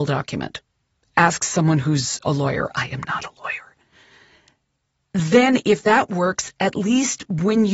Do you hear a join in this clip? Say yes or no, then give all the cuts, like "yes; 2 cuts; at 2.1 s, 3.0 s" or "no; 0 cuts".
no; 0 cuts